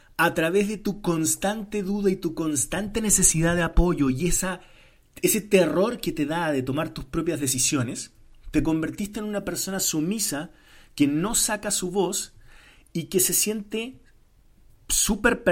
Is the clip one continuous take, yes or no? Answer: yes